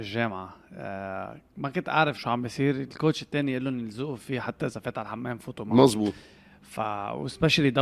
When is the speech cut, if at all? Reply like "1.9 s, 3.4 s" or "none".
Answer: 2.2 s